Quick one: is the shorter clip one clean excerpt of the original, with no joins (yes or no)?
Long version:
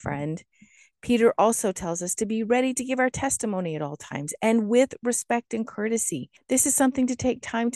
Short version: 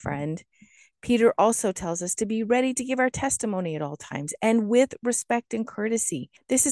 yes